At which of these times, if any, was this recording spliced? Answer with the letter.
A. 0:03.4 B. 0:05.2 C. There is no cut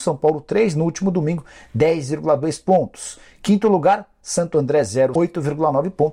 B